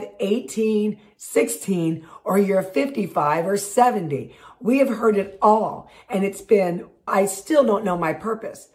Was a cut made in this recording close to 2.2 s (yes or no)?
no